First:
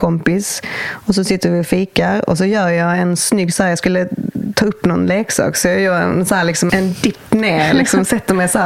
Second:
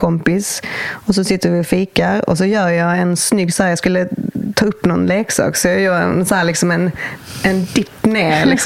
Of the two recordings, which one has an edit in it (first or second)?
first